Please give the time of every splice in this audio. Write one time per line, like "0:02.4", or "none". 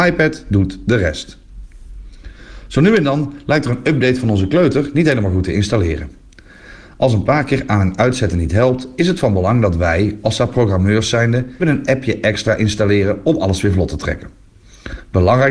0:11.6